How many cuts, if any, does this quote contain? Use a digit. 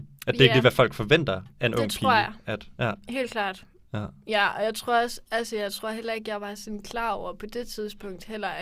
0